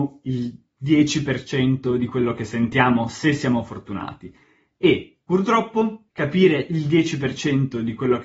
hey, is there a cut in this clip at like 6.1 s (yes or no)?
yes